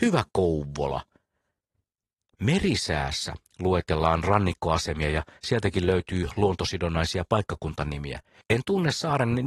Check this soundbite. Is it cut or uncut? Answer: cut